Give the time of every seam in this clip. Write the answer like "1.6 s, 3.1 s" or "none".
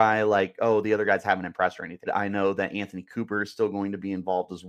2.1 s